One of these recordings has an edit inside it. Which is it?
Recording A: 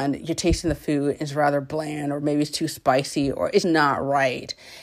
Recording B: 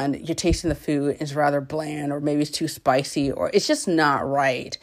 A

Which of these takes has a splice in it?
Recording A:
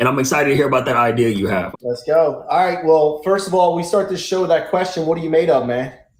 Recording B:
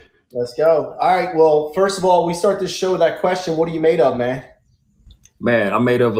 A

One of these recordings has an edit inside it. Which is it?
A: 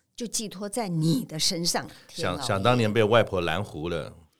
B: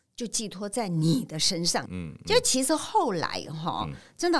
B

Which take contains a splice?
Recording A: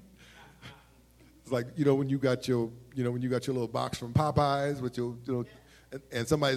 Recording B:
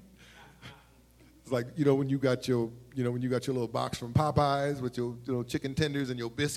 A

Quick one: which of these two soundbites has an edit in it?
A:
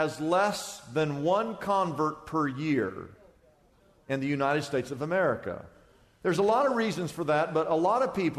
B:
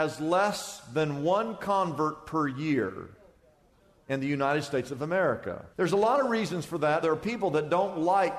B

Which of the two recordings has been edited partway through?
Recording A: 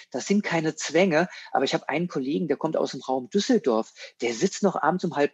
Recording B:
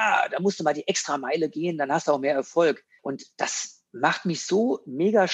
B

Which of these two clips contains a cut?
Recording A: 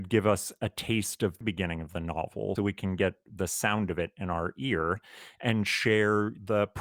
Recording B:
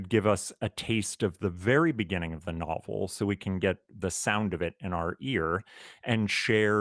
A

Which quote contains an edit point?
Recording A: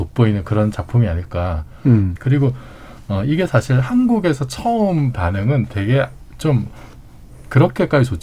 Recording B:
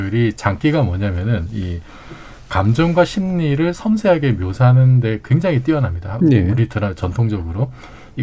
A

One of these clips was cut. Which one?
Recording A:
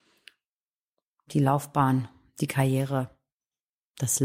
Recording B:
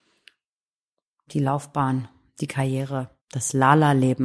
B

